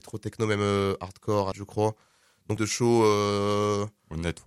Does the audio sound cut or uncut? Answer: cut